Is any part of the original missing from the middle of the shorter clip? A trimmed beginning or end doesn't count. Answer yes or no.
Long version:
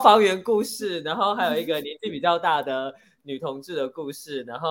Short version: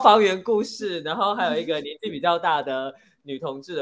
no